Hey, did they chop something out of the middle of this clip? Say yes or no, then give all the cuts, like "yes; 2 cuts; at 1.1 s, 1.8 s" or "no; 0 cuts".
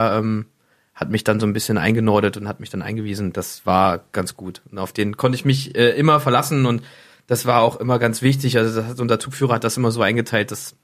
no; 0 cuts